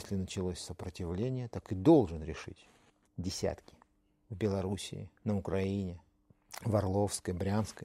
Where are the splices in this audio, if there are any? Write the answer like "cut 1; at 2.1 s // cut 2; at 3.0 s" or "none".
cut 1; at 3.1 s // cut 2; at 5.2 s